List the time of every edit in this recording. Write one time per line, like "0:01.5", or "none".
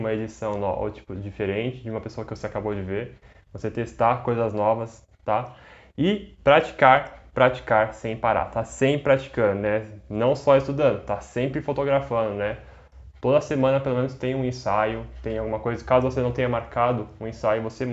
none